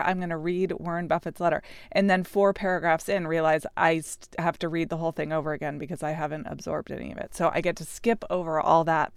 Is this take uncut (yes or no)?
yes